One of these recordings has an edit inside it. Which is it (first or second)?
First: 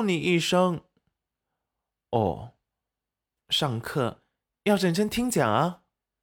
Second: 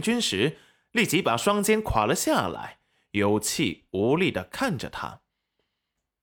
first